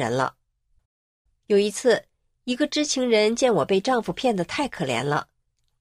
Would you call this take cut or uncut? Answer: uncut